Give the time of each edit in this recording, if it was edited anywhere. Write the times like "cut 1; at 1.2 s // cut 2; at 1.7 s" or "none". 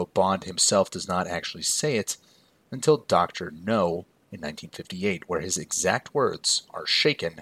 none